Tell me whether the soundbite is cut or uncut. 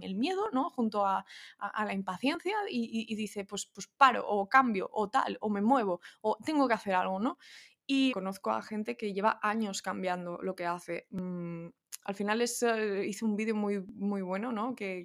cut